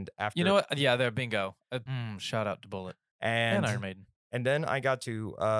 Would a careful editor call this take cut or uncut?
cut